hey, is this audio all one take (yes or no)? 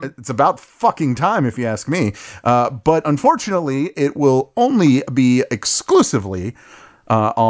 yes